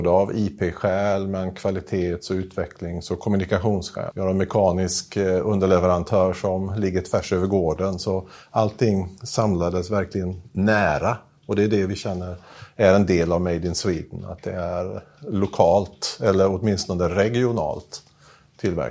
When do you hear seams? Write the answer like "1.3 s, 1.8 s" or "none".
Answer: 4.1 s